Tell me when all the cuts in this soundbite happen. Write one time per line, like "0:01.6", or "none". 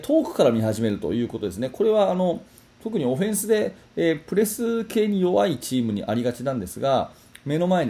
none